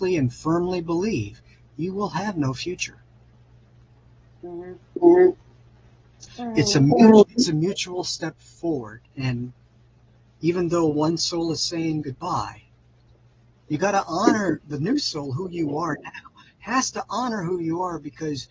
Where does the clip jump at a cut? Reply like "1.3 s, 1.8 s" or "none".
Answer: 6.3 s, 9.1 s